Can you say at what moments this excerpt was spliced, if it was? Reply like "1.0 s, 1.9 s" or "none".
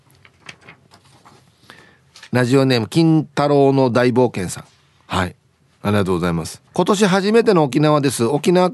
6.7 s